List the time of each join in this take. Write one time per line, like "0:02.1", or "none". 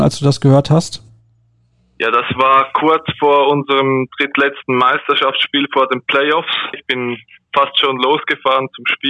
0:06.7